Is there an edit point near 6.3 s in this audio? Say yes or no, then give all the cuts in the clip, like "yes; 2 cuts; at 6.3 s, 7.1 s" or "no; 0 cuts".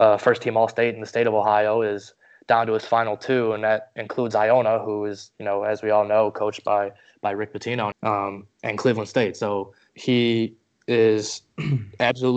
no; 2 cuts; at 7.9 s, 9.9 s